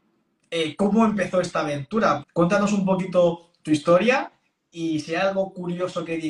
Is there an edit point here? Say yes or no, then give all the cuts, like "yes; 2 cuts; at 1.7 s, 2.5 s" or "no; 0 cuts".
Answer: yes; 1 cut; at 2.2 s